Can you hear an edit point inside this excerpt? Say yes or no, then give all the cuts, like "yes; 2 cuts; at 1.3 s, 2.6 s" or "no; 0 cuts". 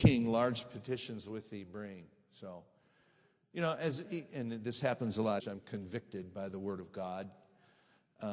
yes; 2 cuts; at 4.1 s, 5.4 s